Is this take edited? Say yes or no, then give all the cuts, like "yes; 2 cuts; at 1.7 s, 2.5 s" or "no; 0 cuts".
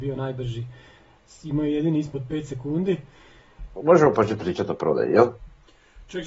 yes; 1 cut; at 3.8 s